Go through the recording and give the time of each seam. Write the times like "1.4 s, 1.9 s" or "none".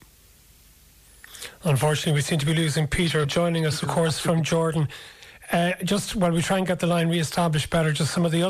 3.2 s